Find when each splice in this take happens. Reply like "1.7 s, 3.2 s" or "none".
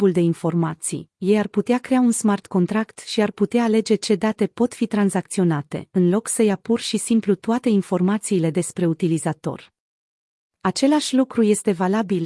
none